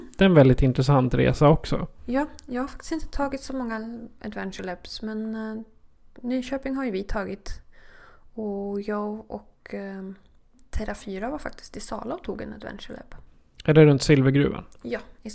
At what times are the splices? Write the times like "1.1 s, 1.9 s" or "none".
none